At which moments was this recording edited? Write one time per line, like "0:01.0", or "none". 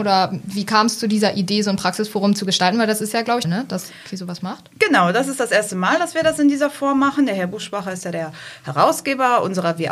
0:03.4